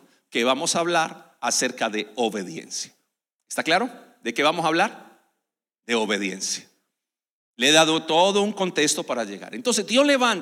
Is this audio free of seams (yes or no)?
yes